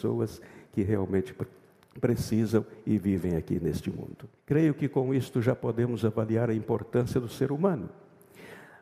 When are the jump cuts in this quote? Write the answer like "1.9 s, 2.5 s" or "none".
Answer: 4.4 s